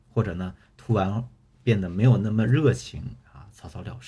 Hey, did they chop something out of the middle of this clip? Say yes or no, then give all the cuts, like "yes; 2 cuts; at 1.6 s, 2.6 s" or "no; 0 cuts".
no; 0 cuts